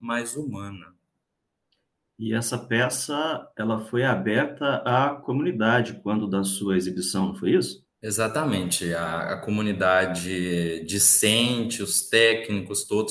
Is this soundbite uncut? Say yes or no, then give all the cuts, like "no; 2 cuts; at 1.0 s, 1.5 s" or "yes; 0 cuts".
no; 1 cut; at 7.9 s